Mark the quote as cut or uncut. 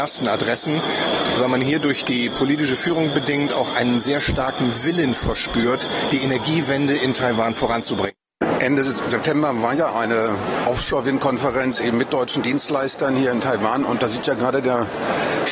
uncut